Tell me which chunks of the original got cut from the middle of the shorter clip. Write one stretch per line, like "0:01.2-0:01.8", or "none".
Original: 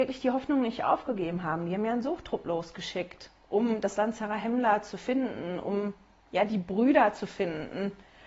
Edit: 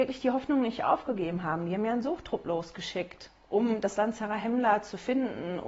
none